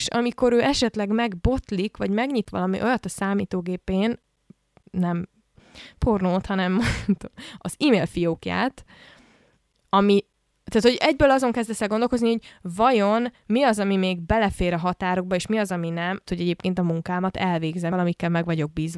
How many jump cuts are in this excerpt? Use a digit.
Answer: 2